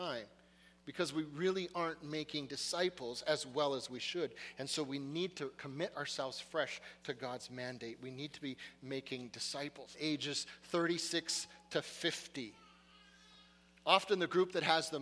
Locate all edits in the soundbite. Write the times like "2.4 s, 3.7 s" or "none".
9.9 s

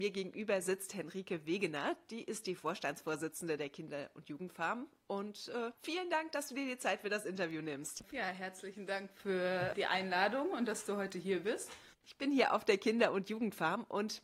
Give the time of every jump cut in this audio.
5.7 s, 11.9 s

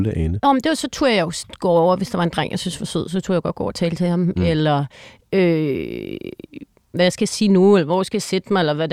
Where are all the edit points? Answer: 6.9 s

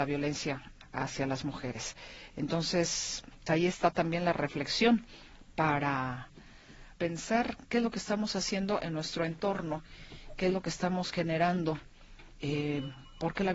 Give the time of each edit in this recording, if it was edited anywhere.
3.5 s, 7.0 s

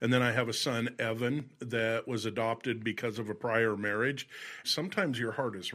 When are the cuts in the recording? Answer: 4.6 s

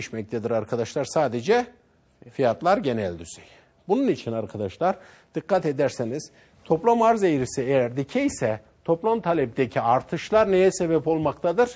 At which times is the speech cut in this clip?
none

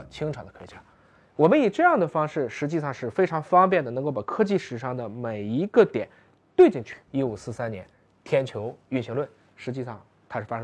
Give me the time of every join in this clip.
7.1 s

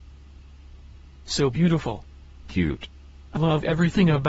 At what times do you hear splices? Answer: 3.4 s

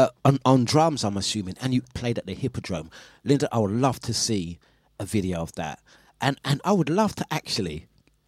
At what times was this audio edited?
1.9 s, 6.4 s

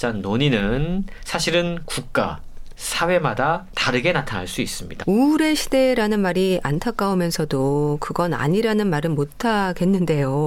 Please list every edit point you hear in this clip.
2.8 s, 5.0 s

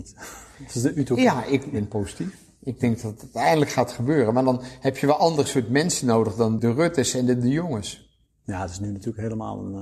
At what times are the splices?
6.6 s

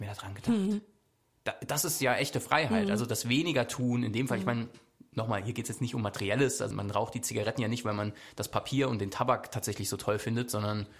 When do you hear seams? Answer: 6.7 s

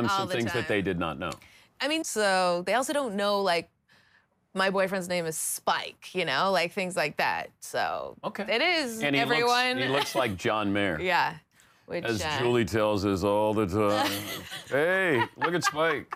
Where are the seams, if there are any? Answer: 2.0 s

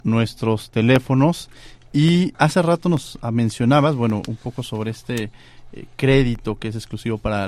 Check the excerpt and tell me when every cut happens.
2.3 s

